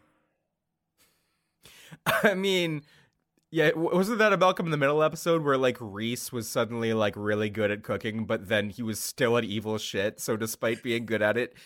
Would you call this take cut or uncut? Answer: uncut